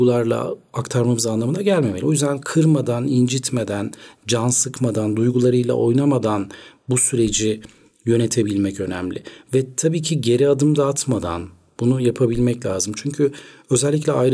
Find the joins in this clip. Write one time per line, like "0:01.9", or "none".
none